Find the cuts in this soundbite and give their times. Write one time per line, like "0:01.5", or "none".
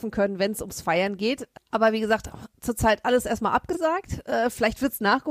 none